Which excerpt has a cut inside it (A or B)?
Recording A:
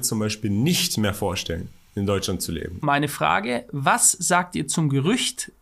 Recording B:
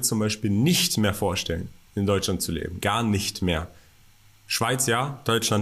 A